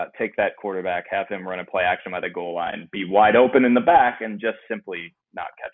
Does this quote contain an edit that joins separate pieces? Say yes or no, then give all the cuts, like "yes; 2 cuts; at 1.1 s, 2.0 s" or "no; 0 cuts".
no; 0 cuts